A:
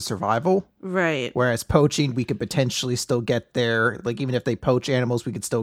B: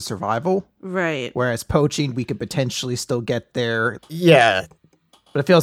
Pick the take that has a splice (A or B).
B